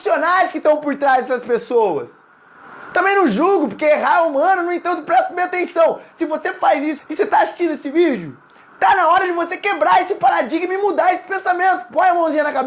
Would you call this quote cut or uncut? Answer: cut